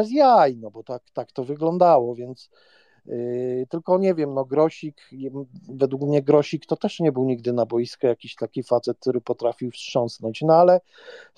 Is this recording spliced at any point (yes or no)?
no